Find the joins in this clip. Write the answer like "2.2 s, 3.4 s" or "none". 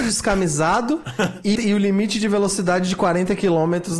1.6 s